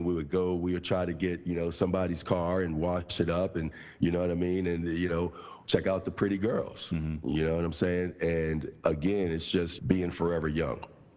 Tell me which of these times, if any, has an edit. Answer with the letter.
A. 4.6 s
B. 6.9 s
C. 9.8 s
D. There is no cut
C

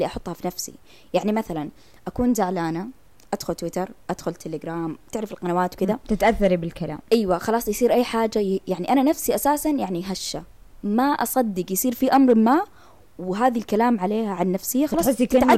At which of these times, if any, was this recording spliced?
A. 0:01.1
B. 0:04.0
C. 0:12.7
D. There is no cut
B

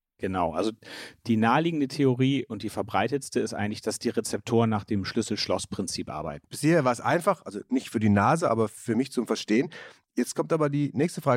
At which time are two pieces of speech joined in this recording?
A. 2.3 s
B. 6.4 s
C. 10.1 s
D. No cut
B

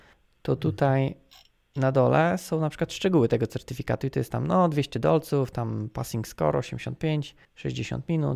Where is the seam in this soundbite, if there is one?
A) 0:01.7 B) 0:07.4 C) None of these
B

